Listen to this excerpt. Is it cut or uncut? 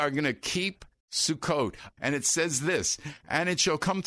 cut